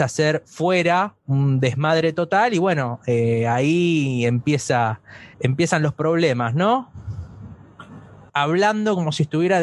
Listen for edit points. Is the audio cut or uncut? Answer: cut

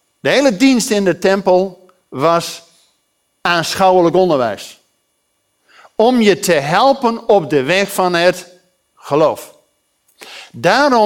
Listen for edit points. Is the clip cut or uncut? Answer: uncut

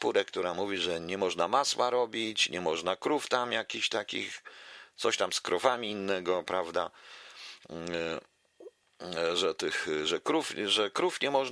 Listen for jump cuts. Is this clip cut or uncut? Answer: uncut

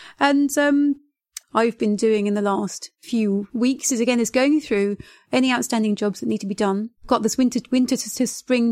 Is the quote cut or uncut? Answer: cut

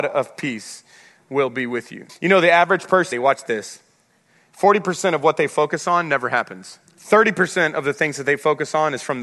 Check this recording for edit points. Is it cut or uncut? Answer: cut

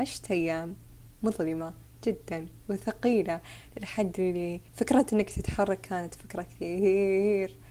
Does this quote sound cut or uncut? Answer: cut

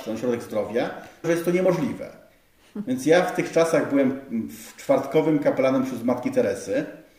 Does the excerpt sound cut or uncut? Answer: cut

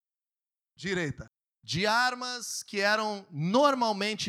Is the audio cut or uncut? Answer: cut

